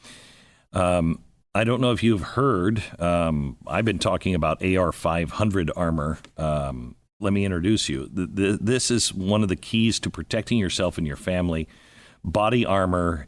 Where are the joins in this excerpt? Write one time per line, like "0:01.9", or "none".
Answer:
0:07.2